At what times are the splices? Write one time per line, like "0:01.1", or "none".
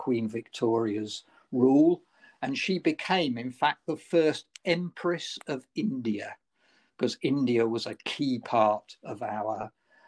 none